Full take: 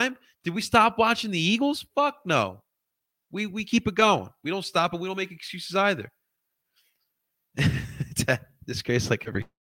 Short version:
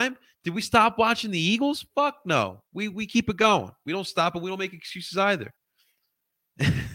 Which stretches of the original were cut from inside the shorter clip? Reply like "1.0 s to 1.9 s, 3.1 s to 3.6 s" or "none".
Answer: 2.7 s to 3.2 s, 6.1 s to 6.5 s

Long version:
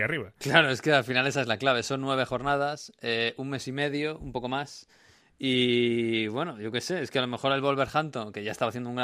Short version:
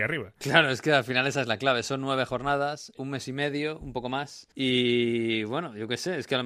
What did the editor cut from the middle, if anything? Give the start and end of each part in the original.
2.9 s to 3.3 s, 4.9 s to 5.4 s

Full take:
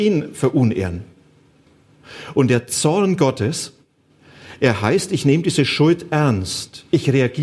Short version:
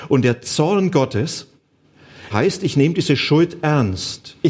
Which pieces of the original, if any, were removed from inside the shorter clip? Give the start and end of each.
4.6 s to 4.8 s

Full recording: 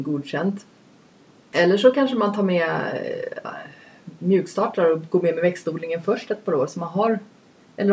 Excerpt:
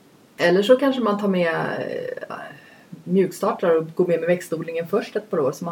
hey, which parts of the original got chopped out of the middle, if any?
none

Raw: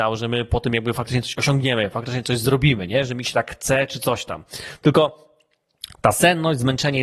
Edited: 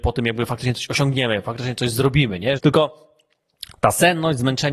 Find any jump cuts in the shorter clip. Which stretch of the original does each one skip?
3.0 s to 4.8 s

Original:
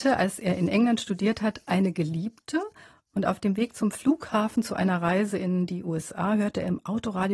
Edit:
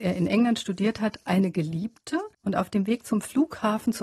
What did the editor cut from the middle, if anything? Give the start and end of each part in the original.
2.8 s to 3.0 s

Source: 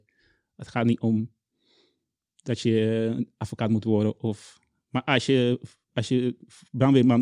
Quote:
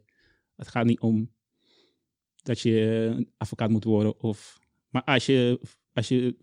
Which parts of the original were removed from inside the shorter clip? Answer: none

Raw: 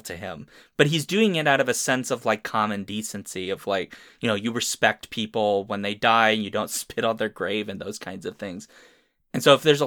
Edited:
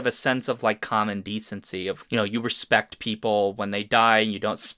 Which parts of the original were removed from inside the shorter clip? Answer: 3.6 s to 4.1 s

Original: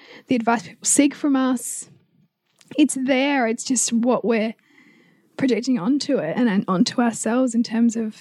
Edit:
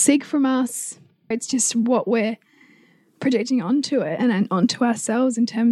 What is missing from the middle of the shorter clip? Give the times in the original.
2.2 s to 3.5 s

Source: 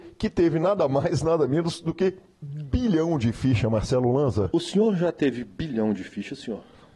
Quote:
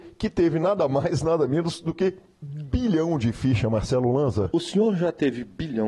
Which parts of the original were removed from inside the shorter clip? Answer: none

